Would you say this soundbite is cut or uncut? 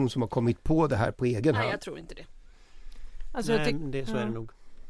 uncut